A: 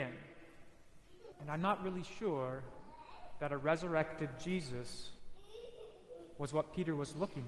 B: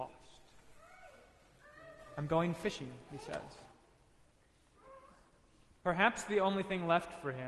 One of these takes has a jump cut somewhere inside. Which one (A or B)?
A